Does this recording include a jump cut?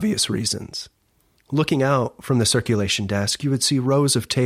no; 0 cuts

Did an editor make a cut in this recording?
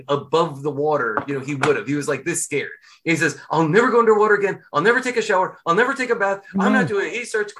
no; 0 cuts

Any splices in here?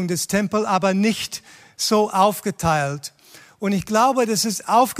no; 0 cuts

